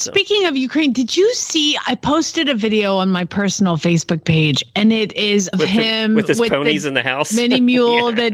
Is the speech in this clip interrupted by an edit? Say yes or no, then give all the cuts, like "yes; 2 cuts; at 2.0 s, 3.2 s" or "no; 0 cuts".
yes; 1 cut; at 5.5 s